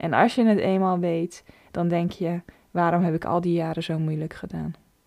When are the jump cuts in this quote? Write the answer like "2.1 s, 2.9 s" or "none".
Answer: none